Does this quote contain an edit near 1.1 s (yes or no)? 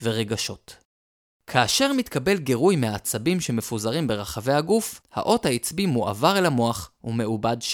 no